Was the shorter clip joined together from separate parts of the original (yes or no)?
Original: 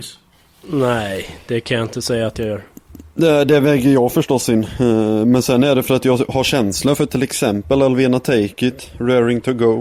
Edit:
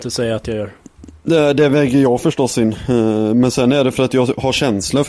no